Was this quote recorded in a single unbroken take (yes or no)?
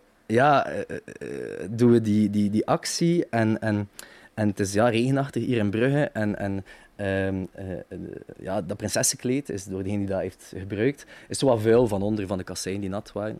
yes